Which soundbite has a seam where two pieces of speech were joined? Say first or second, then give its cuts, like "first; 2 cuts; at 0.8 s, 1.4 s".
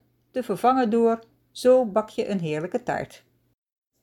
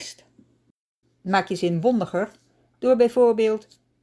second; 1 cut; at 1.0 s